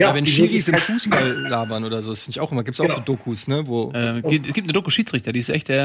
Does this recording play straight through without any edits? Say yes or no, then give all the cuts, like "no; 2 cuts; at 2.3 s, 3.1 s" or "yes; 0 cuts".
yes; 0 cuts